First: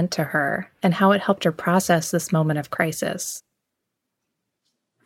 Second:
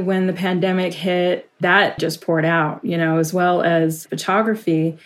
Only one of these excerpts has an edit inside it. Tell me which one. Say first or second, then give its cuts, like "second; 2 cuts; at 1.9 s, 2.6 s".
second; 1 cut; at 2.0 s